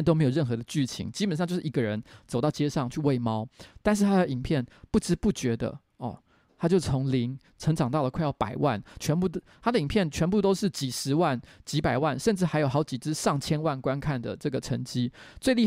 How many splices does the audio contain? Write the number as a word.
one